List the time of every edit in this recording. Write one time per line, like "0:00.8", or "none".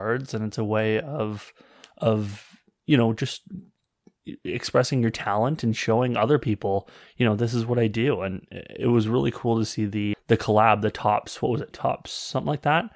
0:10.1
0:11.7

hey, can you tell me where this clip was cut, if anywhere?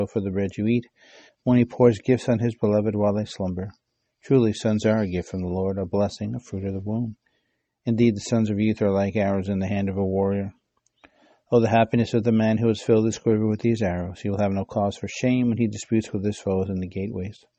none

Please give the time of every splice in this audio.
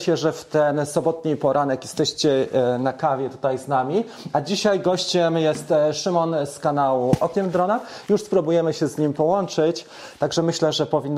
none

